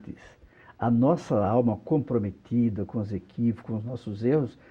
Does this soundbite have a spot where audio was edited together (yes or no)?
no